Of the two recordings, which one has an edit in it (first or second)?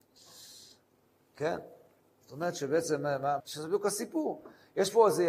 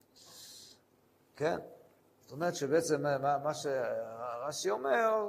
first